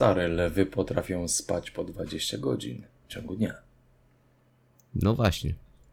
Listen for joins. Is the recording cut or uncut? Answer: uncut